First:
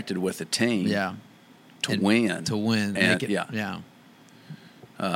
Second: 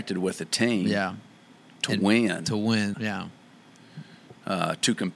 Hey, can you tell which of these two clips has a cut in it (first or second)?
second